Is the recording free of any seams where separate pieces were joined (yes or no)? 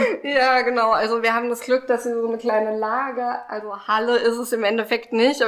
yes